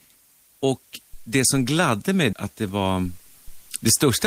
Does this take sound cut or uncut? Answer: cut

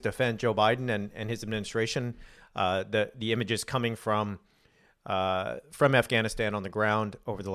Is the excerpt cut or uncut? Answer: uncut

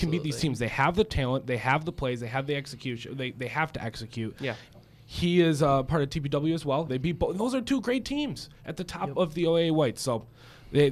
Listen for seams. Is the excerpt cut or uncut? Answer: cut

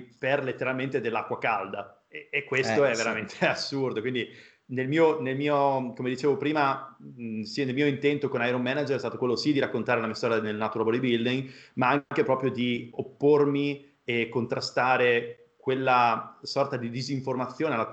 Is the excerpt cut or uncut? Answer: uncut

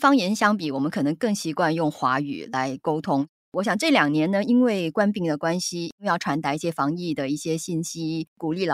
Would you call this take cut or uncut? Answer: uncut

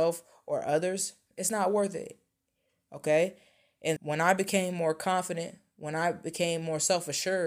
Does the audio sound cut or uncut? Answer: cut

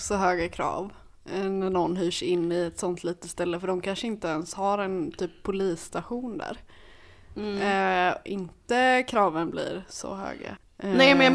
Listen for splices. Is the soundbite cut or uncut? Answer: cut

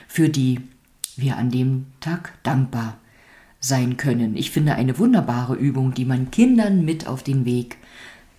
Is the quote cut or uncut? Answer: uncut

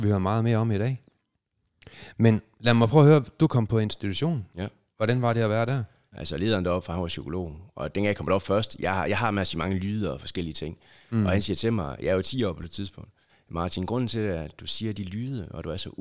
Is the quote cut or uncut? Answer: cut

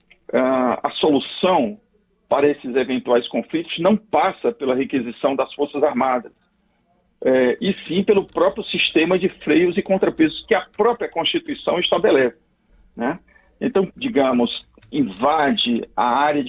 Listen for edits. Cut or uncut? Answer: cut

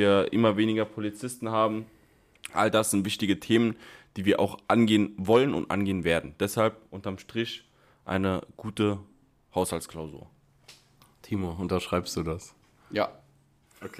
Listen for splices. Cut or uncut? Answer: uncut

